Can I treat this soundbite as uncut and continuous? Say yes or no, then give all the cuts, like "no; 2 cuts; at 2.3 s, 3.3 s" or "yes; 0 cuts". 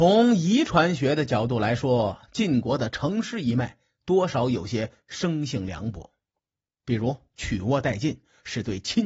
yes; 0 cuts